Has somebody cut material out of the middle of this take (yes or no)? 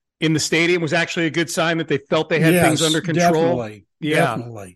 no